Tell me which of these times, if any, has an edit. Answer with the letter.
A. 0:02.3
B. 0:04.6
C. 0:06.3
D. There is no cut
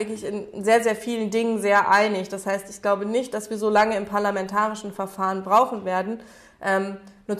D